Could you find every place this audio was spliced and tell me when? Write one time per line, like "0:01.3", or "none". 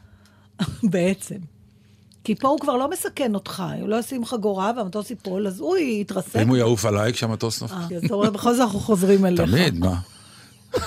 0:07.9

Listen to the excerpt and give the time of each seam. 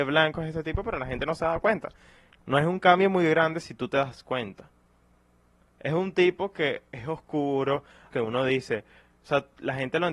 0:02.3
0:08.1

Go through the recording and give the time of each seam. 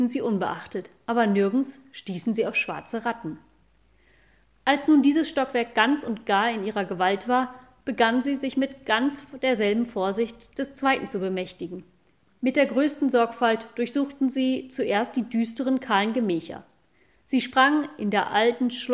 0:12.3

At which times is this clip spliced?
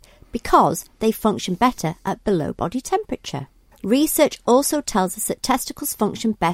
0:03.7

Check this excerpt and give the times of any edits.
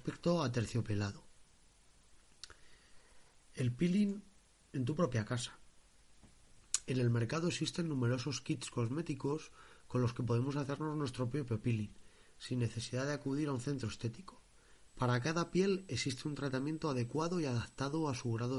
0:14.9

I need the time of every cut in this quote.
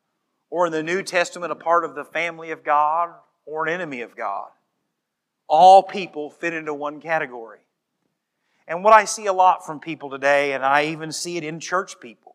none

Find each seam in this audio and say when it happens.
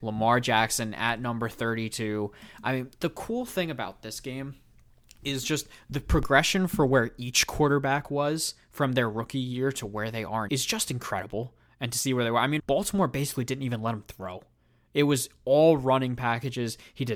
0:10.5
0:12.6

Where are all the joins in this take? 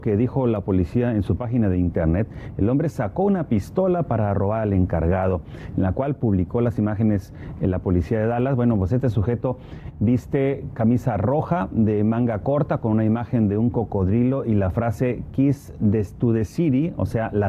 none

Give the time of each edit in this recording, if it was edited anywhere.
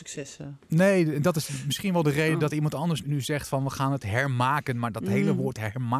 0:03.0

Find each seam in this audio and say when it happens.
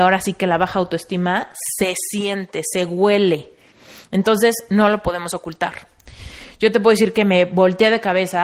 none

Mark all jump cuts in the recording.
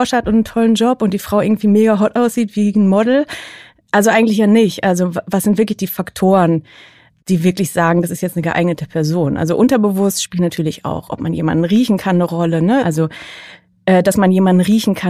0:12.8

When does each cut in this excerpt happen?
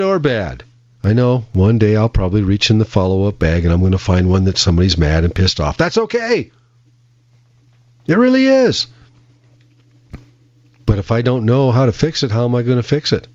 none

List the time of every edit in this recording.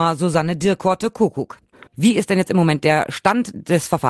0:01.9

